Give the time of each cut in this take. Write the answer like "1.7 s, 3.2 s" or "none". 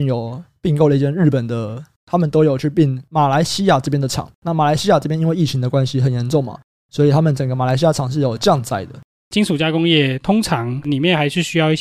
1.9 s, 4.3 s, 9.2 s